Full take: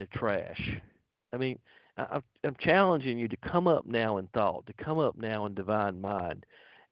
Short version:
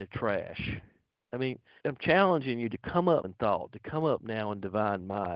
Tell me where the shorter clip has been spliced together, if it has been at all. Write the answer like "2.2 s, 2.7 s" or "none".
1.8 s, 3.2 s